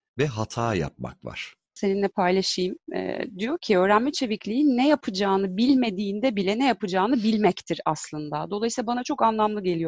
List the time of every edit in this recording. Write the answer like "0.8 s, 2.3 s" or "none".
1.8 s